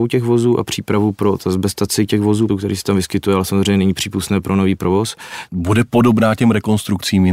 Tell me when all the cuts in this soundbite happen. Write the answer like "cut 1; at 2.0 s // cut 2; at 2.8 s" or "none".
cut 1; at 2.5 s // cut 2; at 5.5 s